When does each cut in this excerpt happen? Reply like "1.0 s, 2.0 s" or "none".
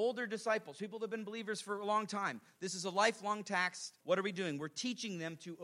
4.0 s